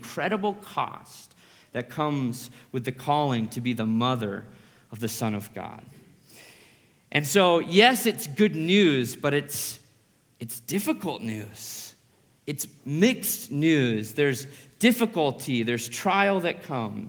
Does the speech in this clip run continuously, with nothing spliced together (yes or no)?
yes